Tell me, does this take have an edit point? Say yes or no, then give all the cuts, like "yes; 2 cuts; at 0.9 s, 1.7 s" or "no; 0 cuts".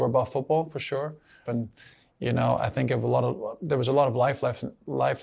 yes; 1 cut; at 1.5 s